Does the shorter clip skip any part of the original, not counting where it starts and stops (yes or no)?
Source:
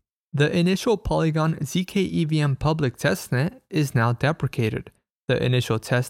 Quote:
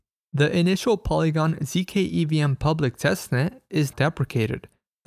yes